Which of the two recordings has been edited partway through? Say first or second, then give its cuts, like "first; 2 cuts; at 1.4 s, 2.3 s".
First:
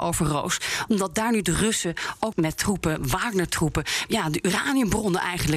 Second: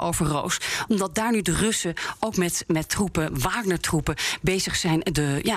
first; 2 cuts; at 2.3 s, 4.1 s